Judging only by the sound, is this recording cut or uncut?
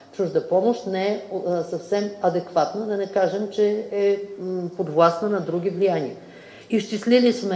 uncut